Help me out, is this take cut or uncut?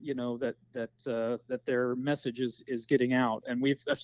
uncut